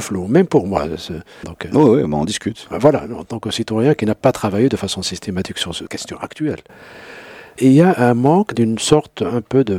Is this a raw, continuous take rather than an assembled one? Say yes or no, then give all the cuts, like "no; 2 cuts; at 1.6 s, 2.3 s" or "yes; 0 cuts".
no; 1 cut; at 1.4 s